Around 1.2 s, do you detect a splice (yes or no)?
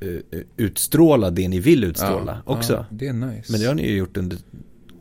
no